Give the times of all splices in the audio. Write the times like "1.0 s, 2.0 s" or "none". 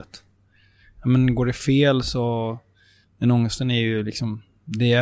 none